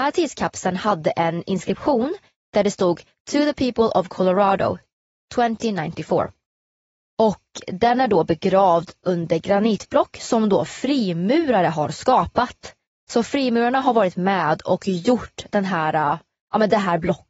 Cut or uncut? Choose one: uncut